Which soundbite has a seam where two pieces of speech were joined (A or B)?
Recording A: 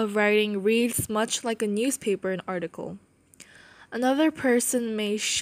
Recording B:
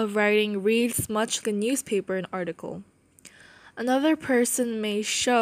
B